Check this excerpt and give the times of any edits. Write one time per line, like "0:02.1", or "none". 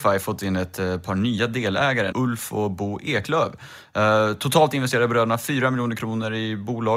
0:02.1